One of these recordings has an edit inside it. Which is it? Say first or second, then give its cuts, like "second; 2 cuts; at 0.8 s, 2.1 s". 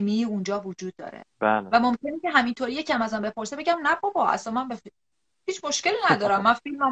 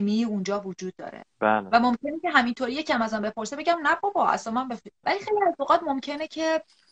second; 1 cut; at 5.0 s